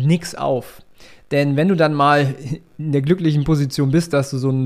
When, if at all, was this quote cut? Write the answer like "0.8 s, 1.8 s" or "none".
none